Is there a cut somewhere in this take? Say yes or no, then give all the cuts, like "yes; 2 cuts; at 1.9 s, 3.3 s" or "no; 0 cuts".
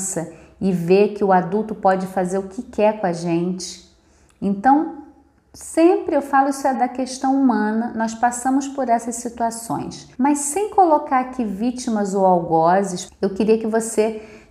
yes; 3 cuts; at 6.7 s, 10.1 s, 13.1 s